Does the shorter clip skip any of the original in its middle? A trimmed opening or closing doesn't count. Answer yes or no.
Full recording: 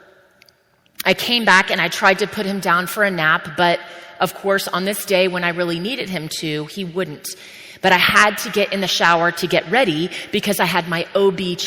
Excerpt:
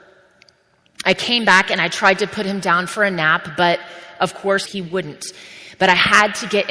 yes